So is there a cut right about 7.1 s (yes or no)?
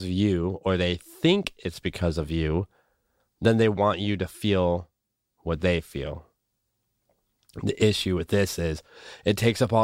no